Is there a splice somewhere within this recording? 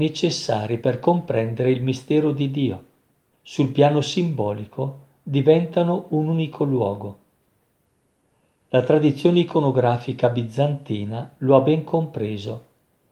yes; 1 cut; at 3.3 s

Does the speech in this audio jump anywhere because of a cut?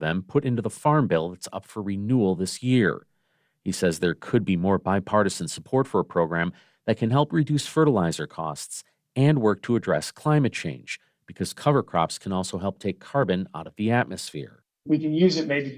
no; 0 cuts

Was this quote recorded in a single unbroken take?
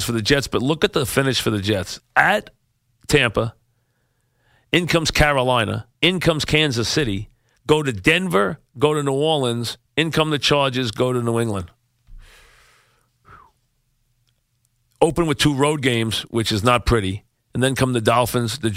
no; 2 cuts; at 2.0 s, 5.9 s

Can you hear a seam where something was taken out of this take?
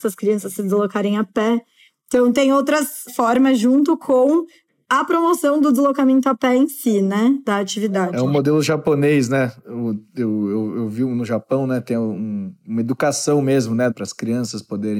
yes; 1 cut; at 13.9 s

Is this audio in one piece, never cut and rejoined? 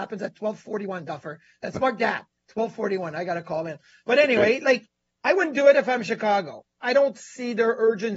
yes; 0 cuts

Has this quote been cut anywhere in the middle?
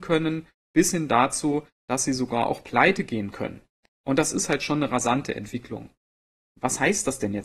yes; 1 cut; at 3.9 s

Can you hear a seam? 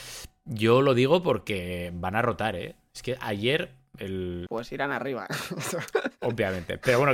yes; 1 cut; at 4.5 s

